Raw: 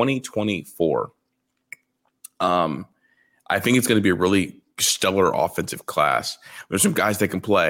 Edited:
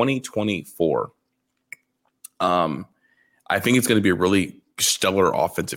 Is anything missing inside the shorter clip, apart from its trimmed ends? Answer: no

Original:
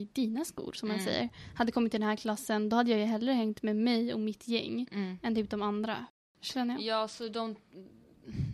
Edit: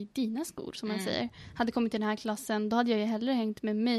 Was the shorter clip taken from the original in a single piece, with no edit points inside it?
yes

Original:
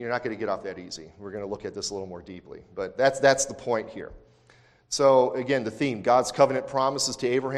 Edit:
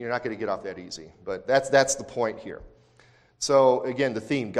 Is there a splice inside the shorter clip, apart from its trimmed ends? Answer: yes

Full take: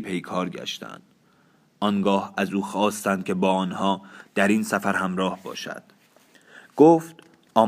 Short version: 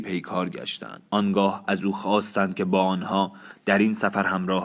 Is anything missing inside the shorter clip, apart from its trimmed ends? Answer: yes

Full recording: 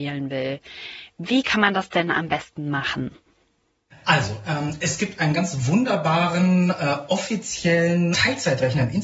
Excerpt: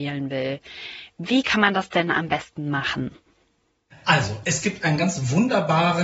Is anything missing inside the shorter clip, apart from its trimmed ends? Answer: yes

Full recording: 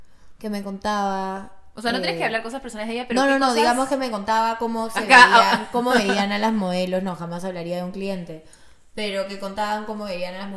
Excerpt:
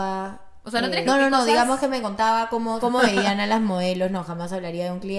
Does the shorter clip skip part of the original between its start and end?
yes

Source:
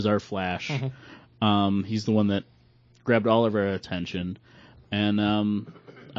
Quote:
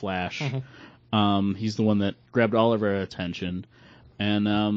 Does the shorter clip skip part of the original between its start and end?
yes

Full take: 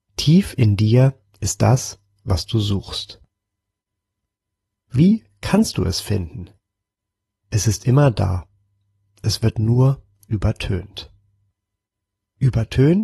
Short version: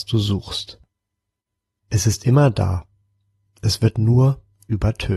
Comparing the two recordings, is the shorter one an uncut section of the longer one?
no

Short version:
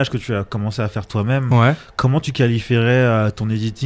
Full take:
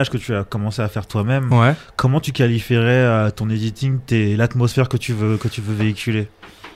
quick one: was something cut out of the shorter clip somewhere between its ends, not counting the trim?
no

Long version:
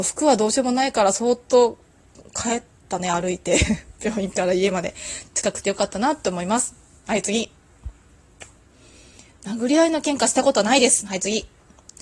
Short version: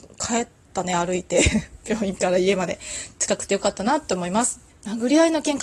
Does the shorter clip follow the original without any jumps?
no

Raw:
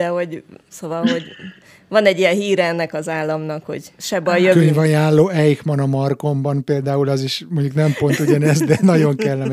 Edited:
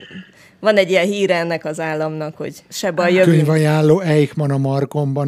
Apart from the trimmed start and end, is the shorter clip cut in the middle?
no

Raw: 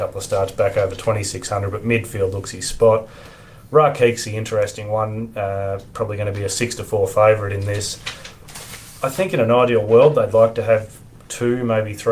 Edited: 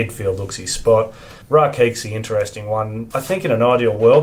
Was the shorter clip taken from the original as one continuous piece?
no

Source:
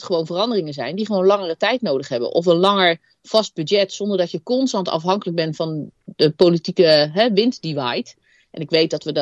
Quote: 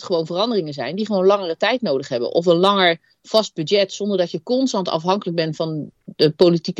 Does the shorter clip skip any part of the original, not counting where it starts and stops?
no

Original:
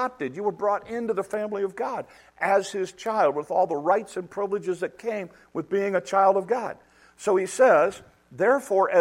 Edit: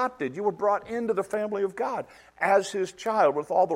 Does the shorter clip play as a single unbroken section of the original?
yes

